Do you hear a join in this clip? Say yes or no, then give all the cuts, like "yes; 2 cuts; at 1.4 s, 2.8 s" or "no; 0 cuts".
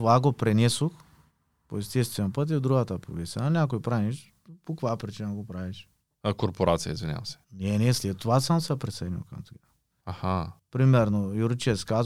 yes; 3 cuts; at 6.1 s, 7.4 s, 10.0 s